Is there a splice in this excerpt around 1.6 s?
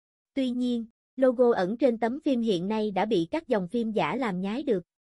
no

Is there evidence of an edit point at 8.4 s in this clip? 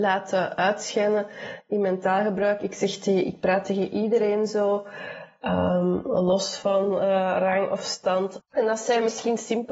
yes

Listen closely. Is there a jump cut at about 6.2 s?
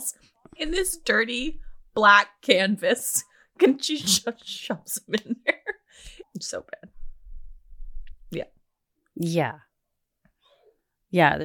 yes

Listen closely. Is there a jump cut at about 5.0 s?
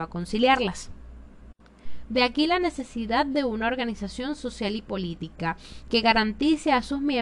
no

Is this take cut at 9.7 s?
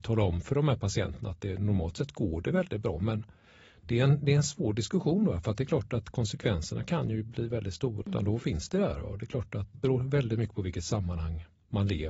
yes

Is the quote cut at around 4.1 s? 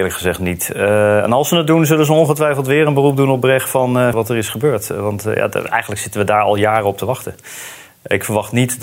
yes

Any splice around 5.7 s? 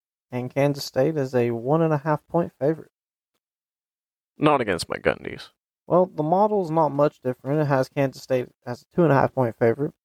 yes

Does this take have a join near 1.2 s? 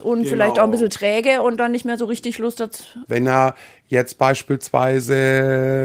no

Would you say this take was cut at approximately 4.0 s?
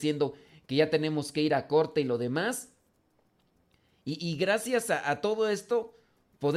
no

